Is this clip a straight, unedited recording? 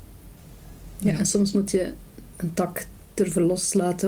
yes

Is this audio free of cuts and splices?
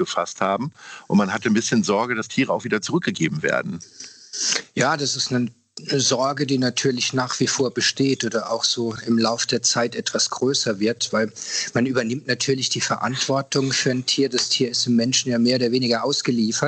yes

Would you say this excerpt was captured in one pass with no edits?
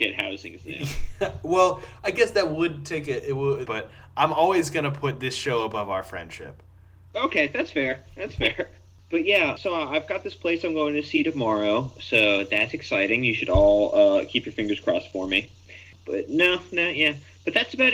no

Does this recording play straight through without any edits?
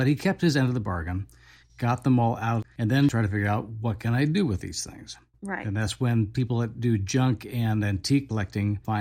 yes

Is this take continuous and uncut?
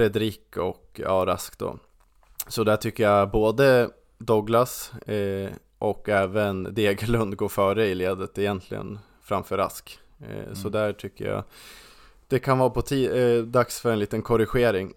yes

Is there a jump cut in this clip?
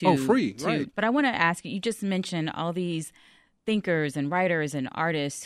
yes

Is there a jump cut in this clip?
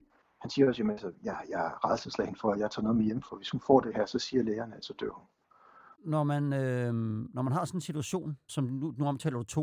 yes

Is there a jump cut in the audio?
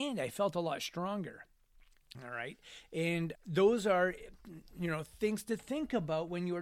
yes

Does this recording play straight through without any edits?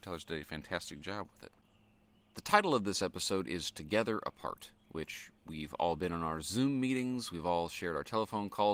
no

